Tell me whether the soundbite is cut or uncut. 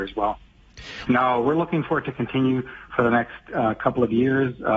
cut